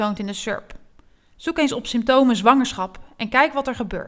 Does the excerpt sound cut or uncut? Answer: uncut